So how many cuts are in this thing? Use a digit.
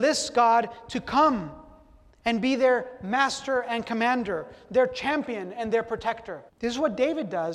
1